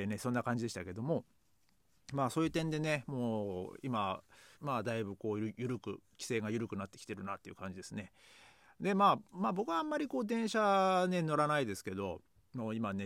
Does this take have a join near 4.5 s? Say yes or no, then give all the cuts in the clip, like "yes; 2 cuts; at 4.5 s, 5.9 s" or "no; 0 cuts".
yes; 1 cut; at 4.5 s